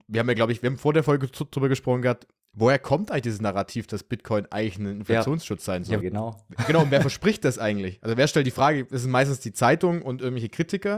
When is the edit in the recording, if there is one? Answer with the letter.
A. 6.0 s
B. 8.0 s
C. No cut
A